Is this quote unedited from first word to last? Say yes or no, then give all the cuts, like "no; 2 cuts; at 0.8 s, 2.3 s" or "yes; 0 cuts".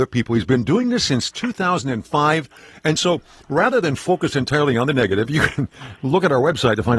yes; 0 cuts